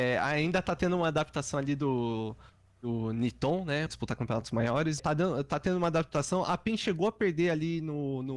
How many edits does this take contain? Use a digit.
2